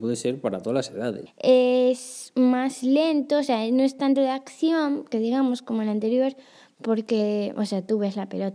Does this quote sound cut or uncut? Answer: cut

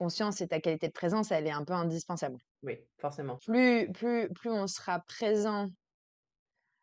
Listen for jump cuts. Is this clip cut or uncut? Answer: cut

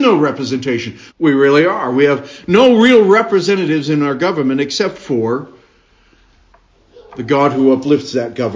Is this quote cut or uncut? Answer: cut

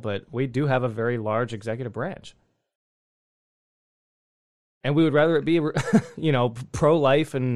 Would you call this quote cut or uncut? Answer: uncut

